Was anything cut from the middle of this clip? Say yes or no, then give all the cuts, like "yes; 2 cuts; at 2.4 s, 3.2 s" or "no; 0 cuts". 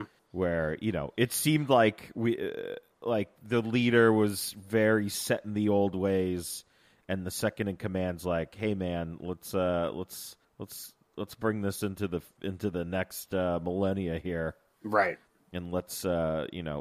no; 0 cuts